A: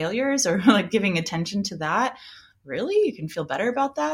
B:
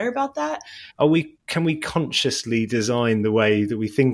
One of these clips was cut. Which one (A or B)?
B